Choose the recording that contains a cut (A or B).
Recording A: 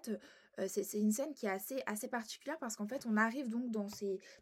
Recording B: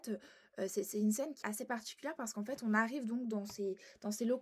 B